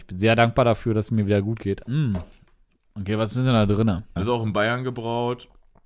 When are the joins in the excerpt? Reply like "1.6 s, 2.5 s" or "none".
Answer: 1.8 s, 4.2 s